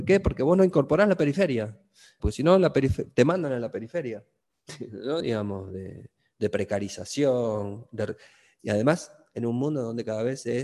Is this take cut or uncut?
cut